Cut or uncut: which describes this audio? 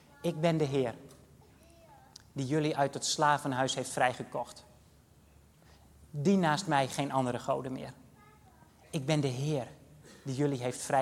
uncut